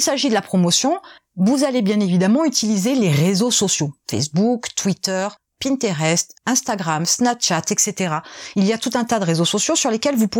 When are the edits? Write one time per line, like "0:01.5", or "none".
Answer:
none